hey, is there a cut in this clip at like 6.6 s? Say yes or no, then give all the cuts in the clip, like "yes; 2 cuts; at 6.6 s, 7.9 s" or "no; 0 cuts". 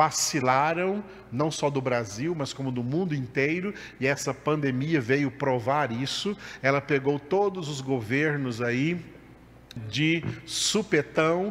no; 1 cut; at 9.8 s